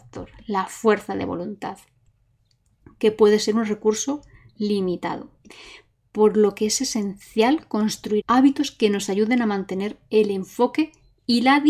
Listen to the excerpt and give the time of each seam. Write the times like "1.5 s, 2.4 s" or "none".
8.2 s